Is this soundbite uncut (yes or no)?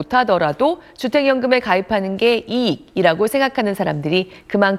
yes